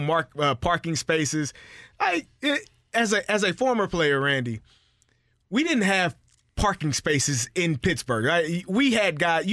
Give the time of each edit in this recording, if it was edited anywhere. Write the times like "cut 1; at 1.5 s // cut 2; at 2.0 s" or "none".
none